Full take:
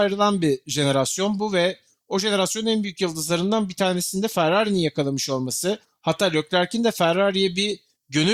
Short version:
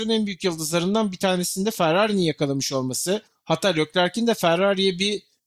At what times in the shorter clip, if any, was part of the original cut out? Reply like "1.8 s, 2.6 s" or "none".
none